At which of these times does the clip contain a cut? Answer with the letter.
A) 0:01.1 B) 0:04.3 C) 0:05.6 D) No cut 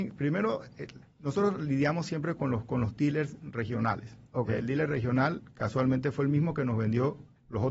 D